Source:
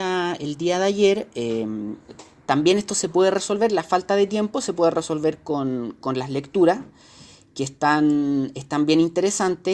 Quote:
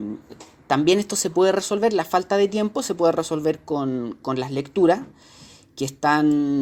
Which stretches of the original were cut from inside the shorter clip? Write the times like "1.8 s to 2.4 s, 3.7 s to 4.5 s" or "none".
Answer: none